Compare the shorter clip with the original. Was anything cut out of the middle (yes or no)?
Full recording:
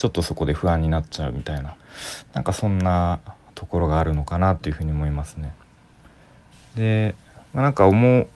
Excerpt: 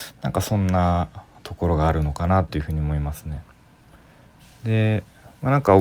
no